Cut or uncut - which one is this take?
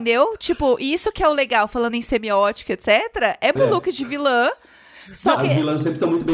cut